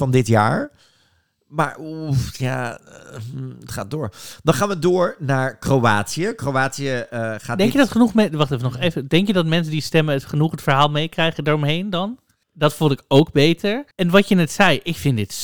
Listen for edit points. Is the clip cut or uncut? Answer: cut